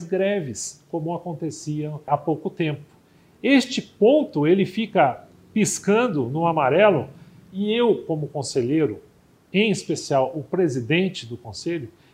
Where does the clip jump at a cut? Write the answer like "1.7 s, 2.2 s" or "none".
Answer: none